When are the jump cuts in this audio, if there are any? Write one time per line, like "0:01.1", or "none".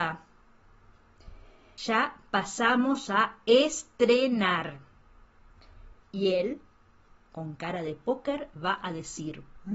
0:01.8
0:05.9